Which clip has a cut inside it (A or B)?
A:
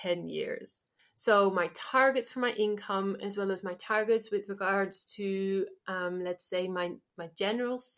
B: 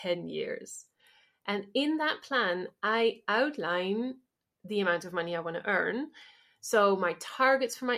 A